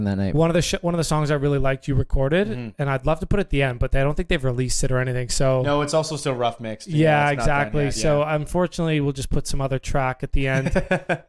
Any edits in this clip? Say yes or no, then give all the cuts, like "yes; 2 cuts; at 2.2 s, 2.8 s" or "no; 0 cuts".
no; 0 cuts